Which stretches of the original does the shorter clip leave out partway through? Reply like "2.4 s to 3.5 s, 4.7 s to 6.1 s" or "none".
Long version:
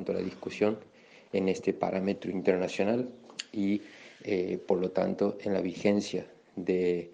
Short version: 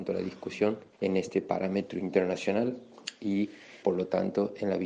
0.9 s to 1.2 s, 4.1 s to 4.7 s